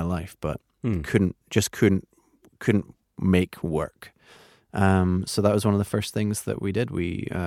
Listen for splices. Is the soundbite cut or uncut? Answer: uncut